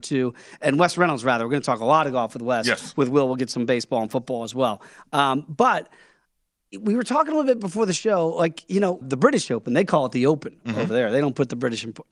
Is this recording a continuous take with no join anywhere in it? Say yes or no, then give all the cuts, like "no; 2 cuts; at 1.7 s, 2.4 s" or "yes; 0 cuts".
no; 1 cut; at 9.0 s